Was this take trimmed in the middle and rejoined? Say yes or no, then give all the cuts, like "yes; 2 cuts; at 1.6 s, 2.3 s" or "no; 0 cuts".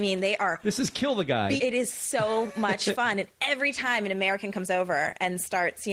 yes; 1 cut; at 1.6 s